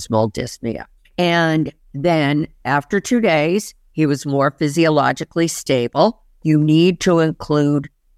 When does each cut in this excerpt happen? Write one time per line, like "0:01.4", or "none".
0:01.0
0:06.3